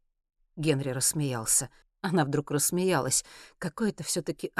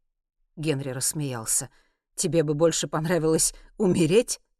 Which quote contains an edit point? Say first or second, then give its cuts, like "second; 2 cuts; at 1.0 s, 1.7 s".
first; 1 cut; at 1.8 s